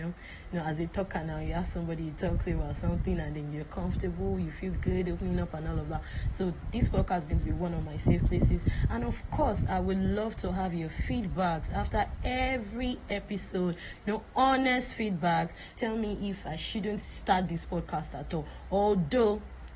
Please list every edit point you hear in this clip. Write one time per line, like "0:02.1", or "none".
0:15.7
0:17.0